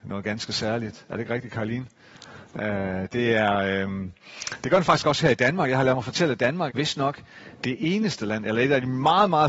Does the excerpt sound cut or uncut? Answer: cut